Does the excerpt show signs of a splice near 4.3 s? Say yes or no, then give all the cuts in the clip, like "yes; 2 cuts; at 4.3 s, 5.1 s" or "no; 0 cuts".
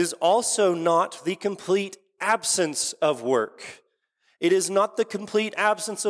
no; 0 cuts